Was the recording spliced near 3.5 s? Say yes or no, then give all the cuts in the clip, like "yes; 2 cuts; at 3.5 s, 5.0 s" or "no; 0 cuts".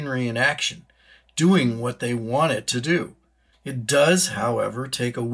yes; 1 cut; at 3.5 s